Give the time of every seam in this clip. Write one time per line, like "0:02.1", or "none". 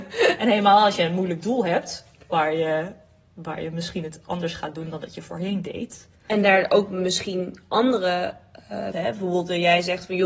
0:08.9

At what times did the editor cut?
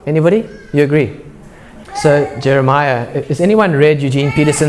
0:01.8

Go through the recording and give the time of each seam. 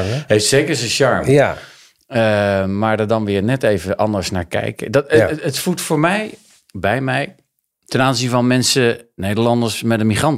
0:07.7

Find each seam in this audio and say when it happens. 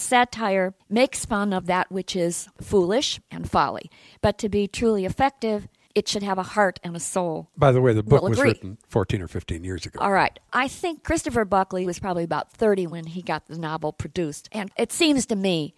0:07.5

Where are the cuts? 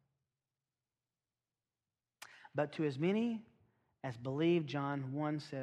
none

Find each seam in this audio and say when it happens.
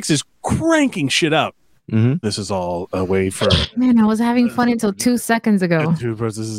0:02.2

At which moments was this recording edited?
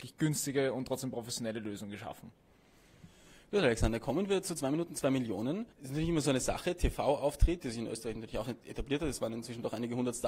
0:05.7
0:07.6

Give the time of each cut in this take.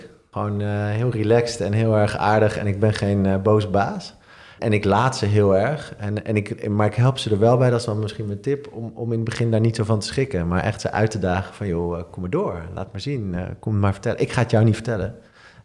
none

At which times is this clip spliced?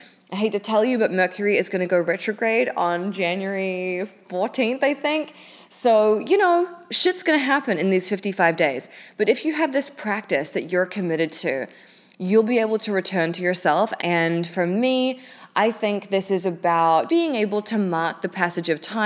0:14.0
0:17.1

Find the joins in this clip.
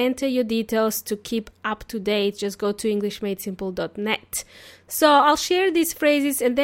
none

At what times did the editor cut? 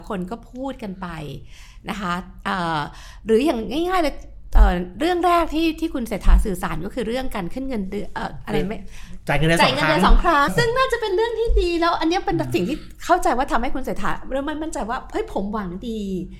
0:10.5

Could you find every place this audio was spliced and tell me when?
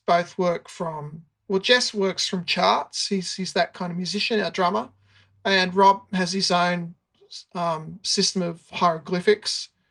none

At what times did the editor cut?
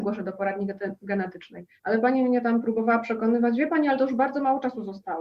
0:01.8

